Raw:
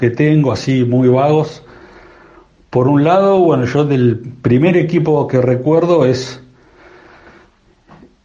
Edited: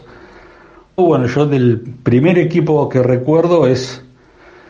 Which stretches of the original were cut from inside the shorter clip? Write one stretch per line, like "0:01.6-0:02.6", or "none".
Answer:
0:02.6-0:03.4